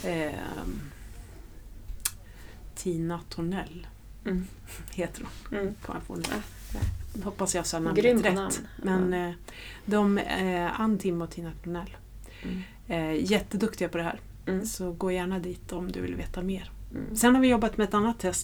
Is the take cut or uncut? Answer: uncut